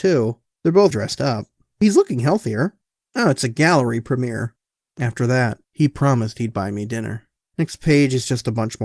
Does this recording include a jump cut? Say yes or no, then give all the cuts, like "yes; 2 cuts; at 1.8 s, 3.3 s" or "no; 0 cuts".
yes; 3 cuts; at 0.9 s, 4.9 s, 7.5 s